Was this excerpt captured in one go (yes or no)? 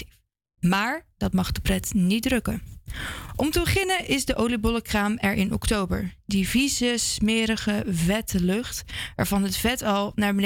yes